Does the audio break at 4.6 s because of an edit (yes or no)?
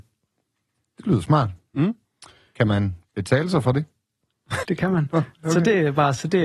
yes